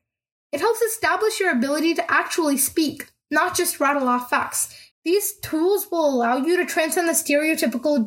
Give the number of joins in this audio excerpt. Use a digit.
1